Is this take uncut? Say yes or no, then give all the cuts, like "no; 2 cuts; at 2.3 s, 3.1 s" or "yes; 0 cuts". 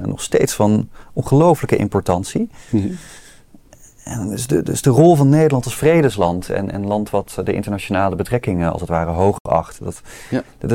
yes; 0 cuts